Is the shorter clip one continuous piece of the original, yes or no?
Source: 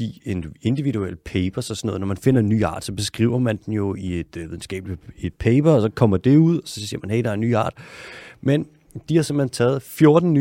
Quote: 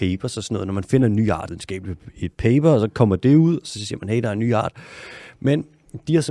no